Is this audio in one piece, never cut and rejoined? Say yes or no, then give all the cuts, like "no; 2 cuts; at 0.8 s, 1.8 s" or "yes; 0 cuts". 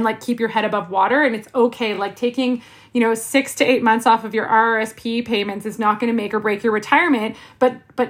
yes; 0 cuts